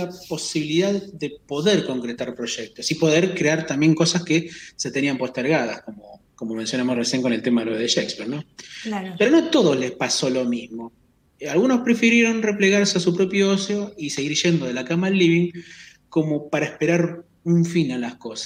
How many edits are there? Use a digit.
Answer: 1